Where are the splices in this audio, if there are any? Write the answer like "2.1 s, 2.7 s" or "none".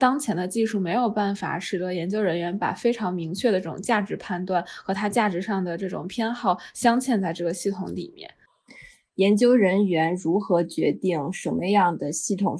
9.1 s